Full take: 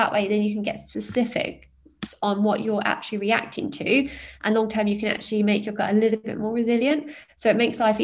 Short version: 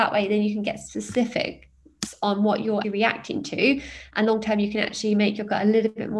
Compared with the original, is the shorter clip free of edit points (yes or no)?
no